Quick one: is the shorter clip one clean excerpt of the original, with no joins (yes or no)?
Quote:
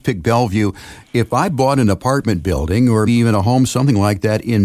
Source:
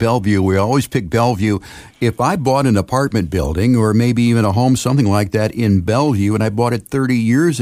no